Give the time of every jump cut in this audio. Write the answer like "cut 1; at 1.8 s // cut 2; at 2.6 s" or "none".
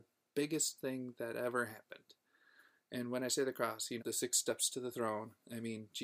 cut 1; at 4.0 s